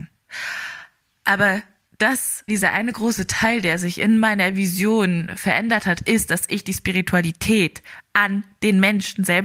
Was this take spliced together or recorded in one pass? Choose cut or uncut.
cut